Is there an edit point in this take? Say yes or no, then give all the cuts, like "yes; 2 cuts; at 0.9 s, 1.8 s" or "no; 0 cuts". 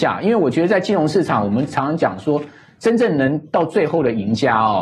no; 0 cuts